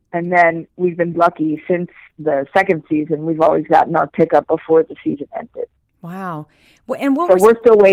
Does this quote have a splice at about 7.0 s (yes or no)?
no